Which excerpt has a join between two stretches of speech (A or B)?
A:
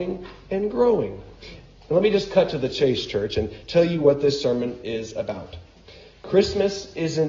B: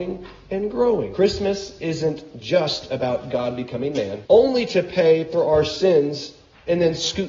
B